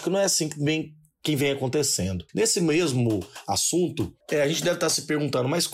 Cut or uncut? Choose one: cut